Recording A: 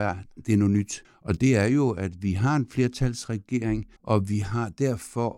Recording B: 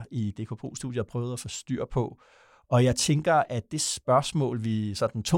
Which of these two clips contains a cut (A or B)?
A